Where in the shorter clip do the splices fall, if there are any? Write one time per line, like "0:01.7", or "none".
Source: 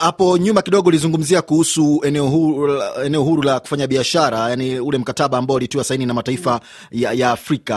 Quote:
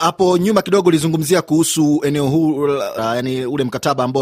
0:03.0